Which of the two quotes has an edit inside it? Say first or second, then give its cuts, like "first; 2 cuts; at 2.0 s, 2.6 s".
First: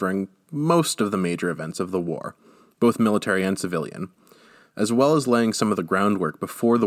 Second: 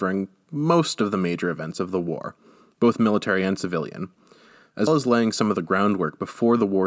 second; 1 cut; at 4.9 s